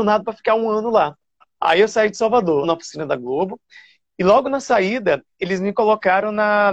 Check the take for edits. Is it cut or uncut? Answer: cut